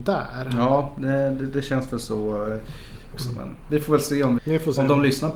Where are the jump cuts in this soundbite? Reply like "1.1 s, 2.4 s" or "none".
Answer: 3.1 s, 4.4 s